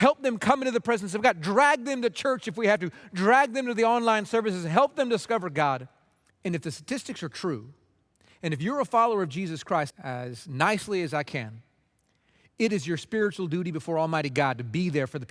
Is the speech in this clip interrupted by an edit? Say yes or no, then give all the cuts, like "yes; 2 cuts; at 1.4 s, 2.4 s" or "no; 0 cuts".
yes; 2 cuts; at 6.3 s, 9.9 s